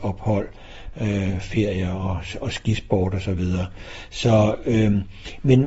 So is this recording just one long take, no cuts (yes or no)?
yes